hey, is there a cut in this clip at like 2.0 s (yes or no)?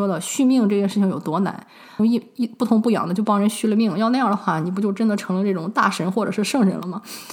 yes